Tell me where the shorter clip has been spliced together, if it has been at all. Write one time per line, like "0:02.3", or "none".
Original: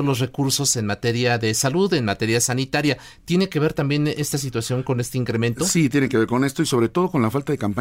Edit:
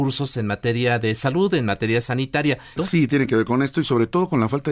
0:02.8